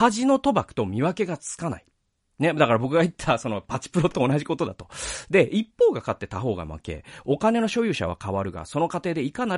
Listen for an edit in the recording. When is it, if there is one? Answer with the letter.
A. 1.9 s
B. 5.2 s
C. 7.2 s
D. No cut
D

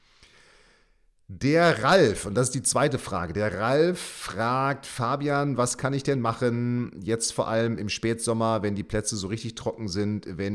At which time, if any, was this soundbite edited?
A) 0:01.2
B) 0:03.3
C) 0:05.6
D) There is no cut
D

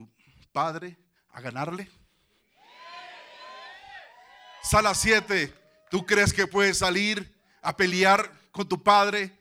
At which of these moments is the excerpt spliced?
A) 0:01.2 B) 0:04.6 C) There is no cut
A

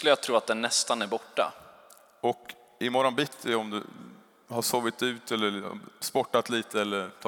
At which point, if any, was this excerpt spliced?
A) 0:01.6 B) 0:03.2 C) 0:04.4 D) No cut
D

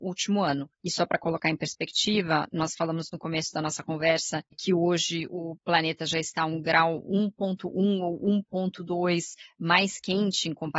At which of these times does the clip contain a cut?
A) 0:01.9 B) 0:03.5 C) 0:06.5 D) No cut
D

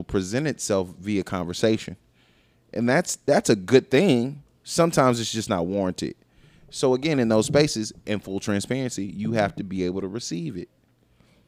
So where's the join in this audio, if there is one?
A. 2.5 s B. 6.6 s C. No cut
C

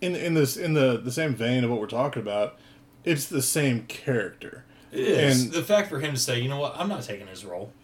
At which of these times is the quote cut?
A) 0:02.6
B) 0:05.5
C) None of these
B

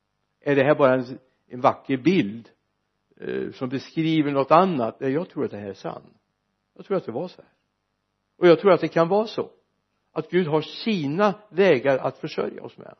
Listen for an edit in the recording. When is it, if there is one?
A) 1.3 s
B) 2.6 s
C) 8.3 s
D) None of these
D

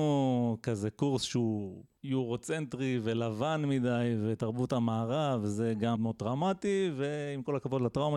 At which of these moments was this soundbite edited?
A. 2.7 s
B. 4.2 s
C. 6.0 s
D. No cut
C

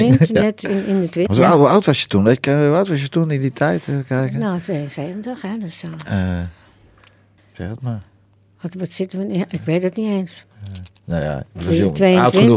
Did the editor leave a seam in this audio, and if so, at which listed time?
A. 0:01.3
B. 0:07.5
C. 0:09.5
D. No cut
A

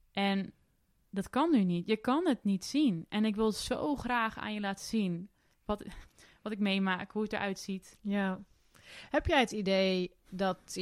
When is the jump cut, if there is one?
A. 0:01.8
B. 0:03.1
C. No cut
C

